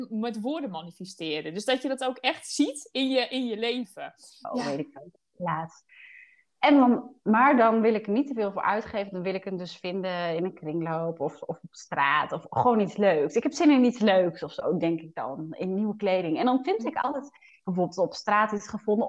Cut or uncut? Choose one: cut